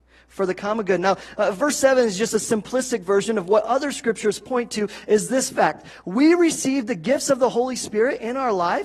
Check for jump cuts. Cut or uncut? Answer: uncut